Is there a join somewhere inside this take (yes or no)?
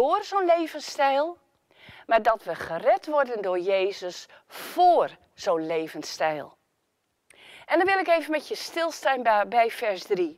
no